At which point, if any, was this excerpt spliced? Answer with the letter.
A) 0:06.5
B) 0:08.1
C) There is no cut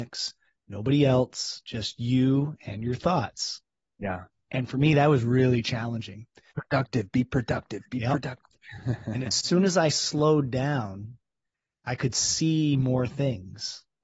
A